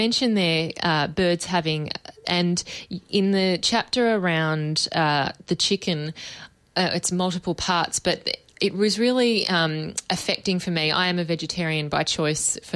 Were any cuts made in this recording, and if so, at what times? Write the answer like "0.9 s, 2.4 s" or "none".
2.2 s